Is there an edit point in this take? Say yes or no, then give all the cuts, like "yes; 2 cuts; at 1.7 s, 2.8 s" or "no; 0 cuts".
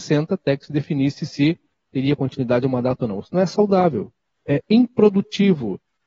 yes; 1 cut; at 4.4 s